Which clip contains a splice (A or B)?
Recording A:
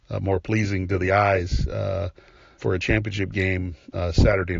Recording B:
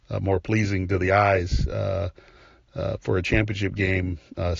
A